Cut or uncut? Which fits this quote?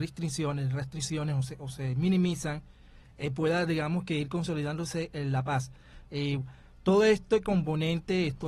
cut